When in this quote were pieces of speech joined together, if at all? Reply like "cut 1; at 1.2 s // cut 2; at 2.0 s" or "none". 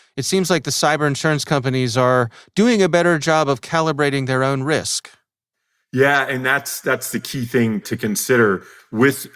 cut 1; at 7.8 s

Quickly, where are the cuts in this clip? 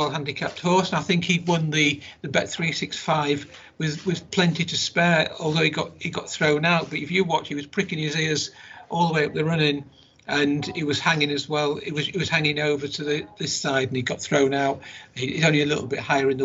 none

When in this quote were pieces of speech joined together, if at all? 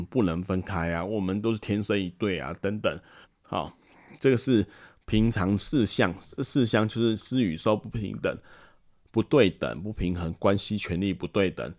cut 1; at 3.2 s

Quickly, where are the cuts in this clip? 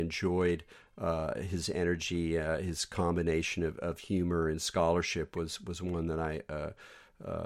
none

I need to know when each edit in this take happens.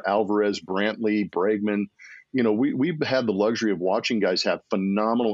none

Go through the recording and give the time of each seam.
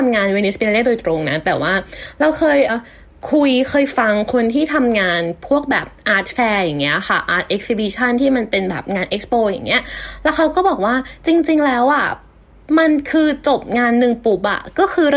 cut 1; at 2.7 s

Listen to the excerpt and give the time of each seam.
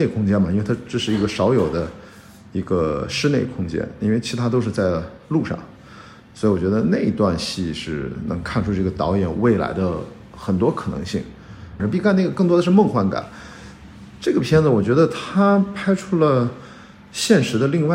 cut 1; at 11.8 s

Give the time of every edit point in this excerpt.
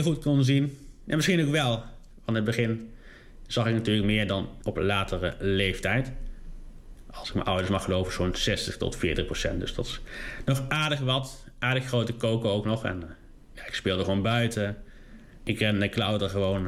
none

